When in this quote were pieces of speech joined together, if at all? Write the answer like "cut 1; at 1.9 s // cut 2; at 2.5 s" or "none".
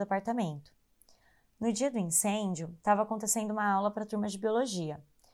none